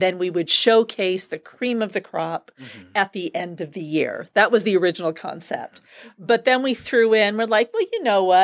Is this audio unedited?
yes; 0 cuts

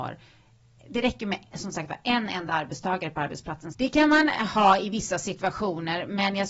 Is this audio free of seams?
no; 1 cut; at 3.7 s

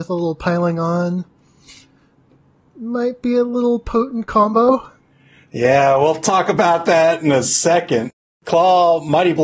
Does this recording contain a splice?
no; 0 cuts

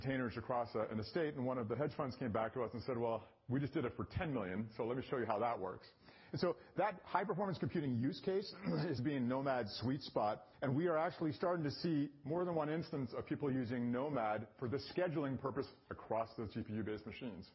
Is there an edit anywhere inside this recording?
yes; 2 cuts; at 9.0 s, 10.5 s

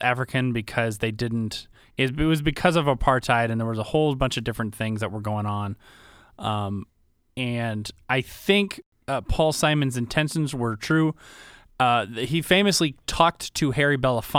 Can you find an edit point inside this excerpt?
no; 0 cuts

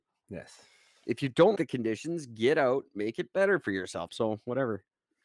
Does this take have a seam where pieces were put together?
yes; 2 cuts; at 1.6 s, 4.1 s

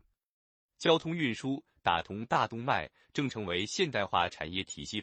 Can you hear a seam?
yes; 1 cut; at 3.1 s

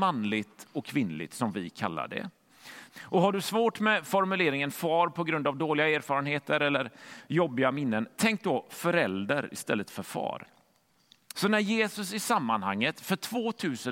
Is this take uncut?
no; 2 cuts; at 2.9 s, 11.3 s

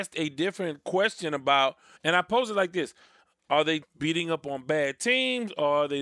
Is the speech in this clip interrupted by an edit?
yes; 2 cuts; at 2.0 s, 3.8 s

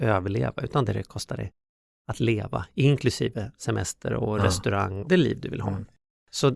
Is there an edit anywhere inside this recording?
yes; 1 cut; at 5.0 s

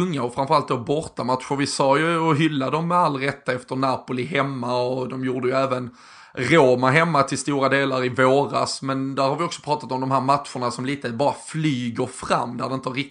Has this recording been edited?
no; 0 cuts

